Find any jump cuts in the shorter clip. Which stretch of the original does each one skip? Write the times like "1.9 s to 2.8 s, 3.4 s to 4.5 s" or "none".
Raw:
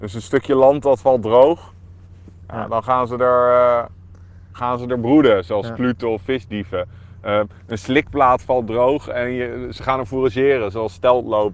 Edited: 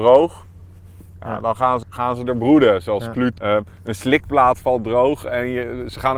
3.1 s to 4.5 s, 6.0 s to 7.2 s